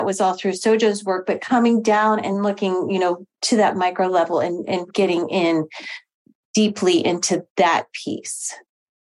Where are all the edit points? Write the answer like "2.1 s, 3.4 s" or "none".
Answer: 4.9 s